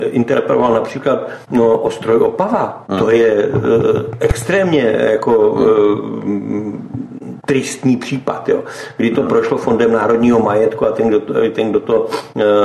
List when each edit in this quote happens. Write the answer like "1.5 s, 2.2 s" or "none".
none